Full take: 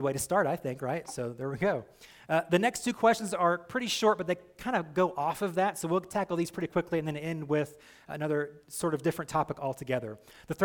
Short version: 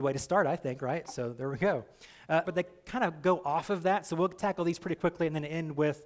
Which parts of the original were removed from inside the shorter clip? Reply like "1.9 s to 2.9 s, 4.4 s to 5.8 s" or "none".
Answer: 2.4 s to 4.2 s